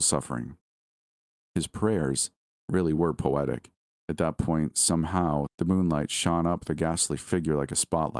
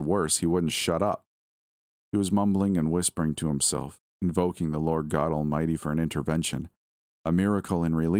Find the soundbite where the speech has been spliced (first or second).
first